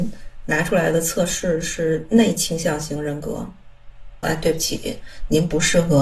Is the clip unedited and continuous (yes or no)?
no